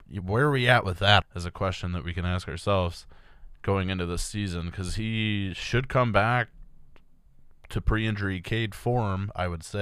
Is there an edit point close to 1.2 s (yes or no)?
yes